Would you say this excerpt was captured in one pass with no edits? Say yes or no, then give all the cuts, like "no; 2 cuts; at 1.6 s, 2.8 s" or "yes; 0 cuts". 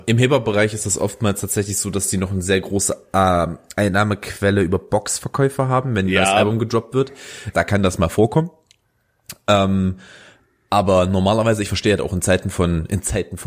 no; 1 cut; at 7.5 s